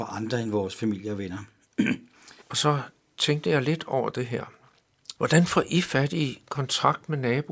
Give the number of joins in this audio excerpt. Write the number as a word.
two